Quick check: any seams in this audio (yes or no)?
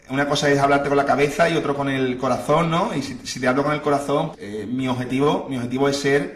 yes